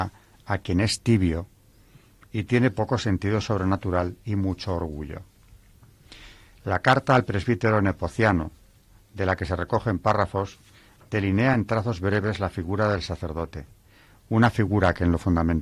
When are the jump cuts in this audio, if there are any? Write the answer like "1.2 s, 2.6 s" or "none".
none